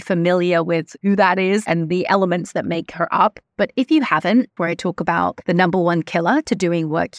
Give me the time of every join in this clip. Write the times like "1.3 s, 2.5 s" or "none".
4.6 s